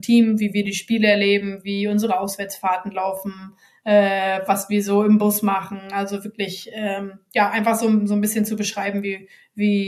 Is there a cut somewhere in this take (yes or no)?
no